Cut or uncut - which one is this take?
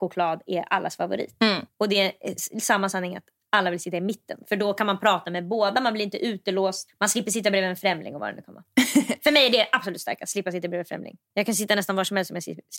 cut